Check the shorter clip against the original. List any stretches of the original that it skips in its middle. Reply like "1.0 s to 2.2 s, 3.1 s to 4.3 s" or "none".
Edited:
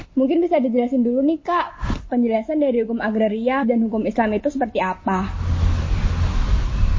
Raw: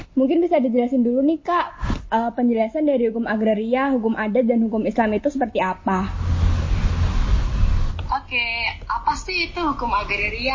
2.1 s to 2.3 s, 3.9 s to 4.4 s